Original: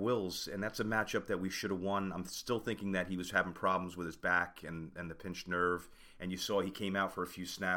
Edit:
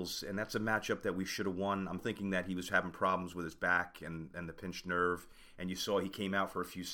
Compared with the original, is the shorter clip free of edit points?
no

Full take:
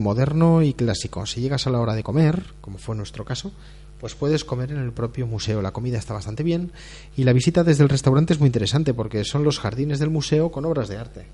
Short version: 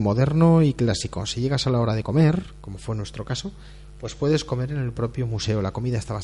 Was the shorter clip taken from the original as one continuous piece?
yes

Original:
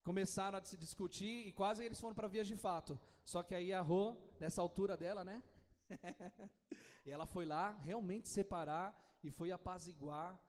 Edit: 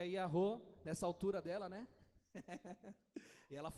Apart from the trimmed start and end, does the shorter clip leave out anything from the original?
no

